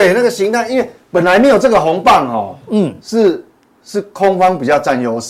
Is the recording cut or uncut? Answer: uncut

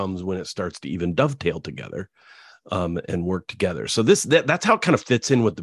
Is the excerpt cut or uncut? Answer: uncut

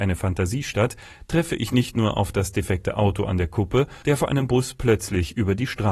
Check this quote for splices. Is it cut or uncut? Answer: cut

